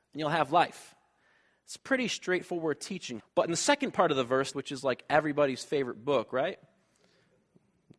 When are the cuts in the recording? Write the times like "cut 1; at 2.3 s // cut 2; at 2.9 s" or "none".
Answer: cut 1; at 3.2 s // cut 2; at 4.5 s